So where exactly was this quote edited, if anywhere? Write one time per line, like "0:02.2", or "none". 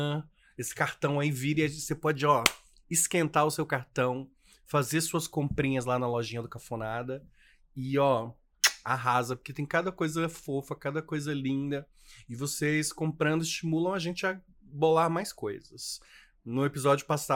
none